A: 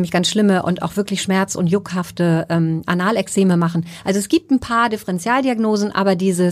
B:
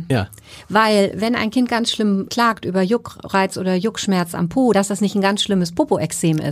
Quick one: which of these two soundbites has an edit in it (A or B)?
B